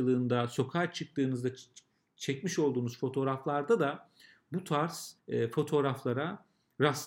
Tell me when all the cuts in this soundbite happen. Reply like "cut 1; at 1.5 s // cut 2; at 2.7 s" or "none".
cut 1; at 5.2 s